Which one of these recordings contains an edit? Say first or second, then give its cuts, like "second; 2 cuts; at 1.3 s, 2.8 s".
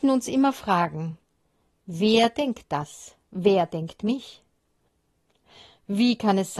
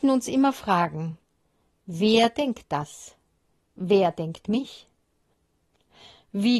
first; 1 cut; at 3.2 s